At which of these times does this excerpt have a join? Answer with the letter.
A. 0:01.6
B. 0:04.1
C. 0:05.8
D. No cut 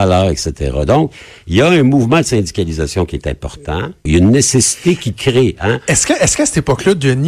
B